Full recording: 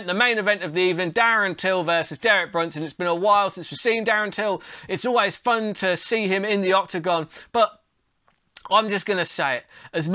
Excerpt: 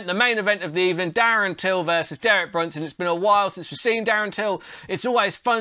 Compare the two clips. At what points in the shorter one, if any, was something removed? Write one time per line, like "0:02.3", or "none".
none